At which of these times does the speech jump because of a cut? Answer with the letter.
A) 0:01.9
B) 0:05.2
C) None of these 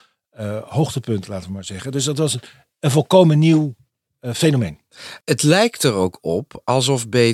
B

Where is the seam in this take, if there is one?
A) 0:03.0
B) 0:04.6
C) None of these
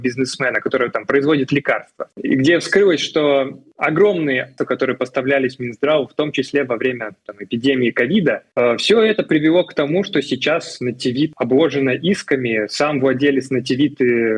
B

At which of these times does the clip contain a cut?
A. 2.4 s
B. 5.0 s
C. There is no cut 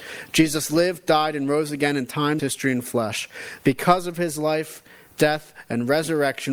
A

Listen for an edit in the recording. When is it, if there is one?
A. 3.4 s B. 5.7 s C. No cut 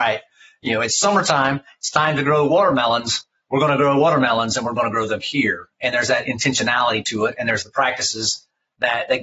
C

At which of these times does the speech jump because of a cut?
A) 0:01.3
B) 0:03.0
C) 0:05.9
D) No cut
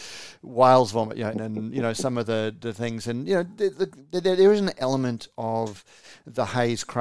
A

